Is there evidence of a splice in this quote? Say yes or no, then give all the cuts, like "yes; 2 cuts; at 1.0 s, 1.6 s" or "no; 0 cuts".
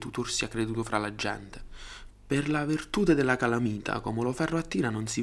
yes; 1 cut; at 2.1 s